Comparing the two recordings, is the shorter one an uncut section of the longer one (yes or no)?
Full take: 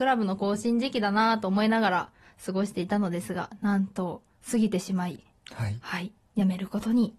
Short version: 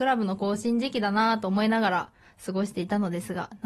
yes